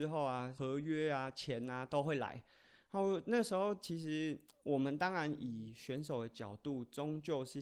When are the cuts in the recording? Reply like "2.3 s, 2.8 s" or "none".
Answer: none